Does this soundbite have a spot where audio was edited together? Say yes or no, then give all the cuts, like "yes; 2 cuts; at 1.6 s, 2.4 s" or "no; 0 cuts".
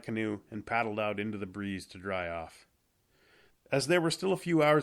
yes; 1 cut; at 3.5 s